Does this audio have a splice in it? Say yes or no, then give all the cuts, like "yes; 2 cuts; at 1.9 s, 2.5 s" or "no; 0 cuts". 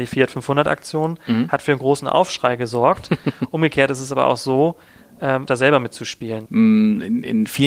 yes; 2 cuts; at 5.5 s, 6.5 s